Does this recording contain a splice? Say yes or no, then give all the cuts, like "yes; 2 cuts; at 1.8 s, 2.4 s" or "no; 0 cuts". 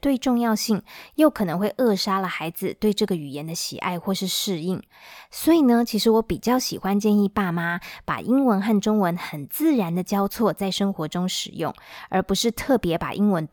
no; 0 cuts